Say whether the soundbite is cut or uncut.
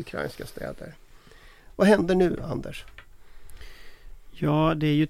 uncut